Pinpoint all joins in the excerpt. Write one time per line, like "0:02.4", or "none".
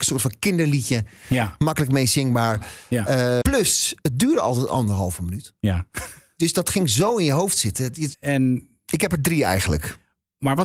0:03.4
0:08.1